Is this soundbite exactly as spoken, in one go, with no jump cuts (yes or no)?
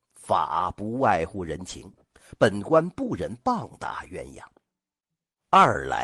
yes